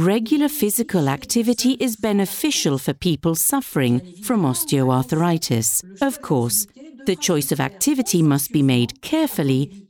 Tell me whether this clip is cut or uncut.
uncut